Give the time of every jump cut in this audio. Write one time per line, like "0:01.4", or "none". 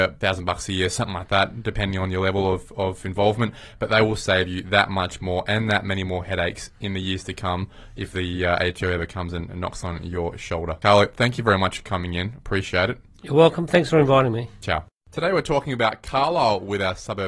none